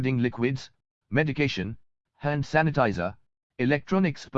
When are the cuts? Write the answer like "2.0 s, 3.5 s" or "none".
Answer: 3.4 s